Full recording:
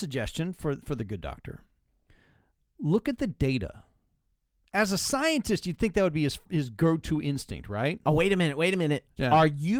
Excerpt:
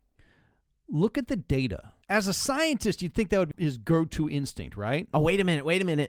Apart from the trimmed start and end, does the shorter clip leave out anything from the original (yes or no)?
yes